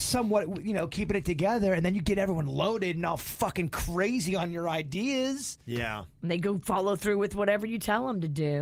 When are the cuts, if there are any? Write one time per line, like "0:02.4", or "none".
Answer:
none